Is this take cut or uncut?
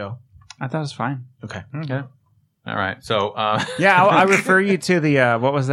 uncut